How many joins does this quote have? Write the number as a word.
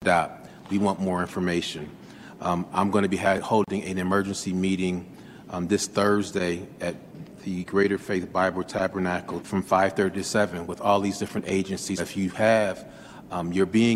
two